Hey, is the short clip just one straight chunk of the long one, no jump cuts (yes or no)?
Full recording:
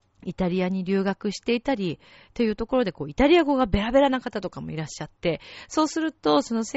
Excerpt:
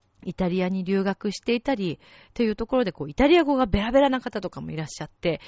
yes